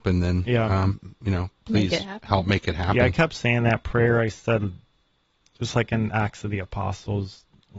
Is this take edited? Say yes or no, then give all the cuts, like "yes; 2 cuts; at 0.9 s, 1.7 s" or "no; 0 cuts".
no; 0 cuts